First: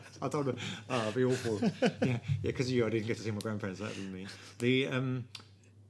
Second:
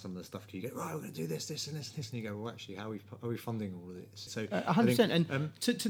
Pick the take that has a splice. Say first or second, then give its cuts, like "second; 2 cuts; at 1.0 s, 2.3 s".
second; 1 cut; at 4.3 s